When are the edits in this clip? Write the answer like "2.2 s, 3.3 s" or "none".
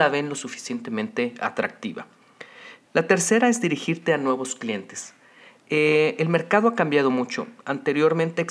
2.9 s